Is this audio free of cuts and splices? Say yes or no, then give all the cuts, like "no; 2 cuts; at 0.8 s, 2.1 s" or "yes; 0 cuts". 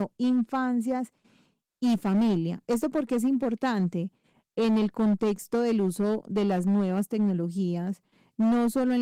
yes; 0 cuts